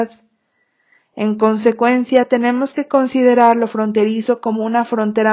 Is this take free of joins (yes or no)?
yes